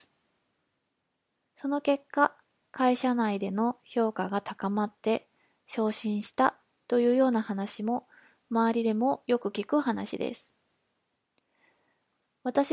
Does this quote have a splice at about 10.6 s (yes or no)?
no